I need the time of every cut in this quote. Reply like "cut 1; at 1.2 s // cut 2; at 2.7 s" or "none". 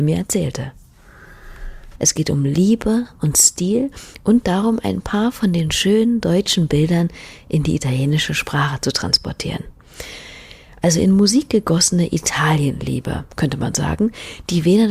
cut 1; at 2.0 s